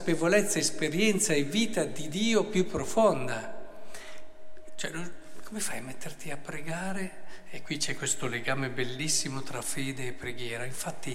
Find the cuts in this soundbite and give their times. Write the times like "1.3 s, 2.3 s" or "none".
4.7 s